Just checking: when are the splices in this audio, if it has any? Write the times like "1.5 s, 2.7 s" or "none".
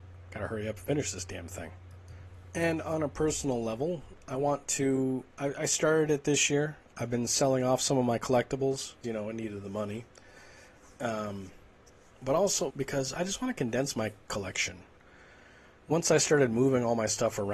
9.0 s, 12.7 s